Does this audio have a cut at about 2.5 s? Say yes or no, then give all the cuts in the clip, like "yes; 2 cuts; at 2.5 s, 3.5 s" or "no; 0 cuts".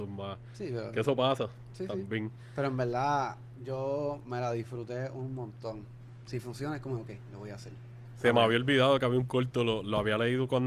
no; 2 cuts; at 6.2 s, 8.1 s